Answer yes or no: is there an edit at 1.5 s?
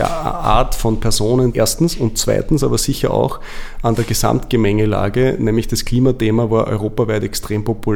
yes